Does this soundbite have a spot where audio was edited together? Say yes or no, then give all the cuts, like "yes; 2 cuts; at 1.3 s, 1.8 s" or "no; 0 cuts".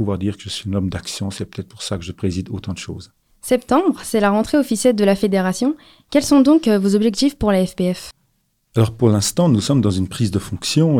no; 0 cuts